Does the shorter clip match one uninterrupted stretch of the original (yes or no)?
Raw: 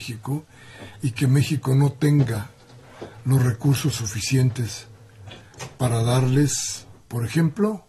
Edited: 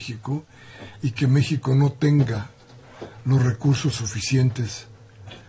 yes